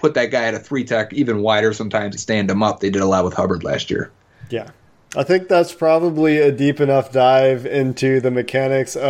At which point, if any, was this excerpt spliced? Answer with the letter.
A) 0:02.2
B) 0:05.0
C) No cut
A